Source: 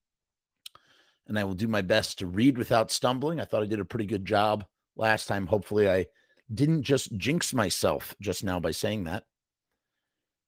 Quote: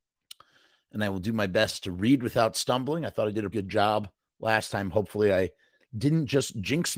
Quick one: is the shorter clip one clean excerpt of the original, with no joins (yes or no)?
no